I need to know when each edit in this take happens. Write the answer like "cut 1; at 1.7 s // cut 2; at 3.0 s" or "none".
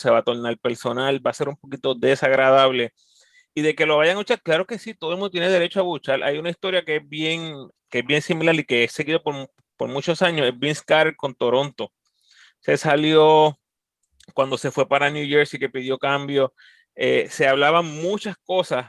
cut 1; at 7.8 s